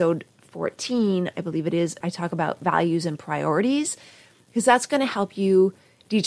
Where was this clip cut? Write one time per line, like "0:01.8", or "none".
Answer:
0:02.0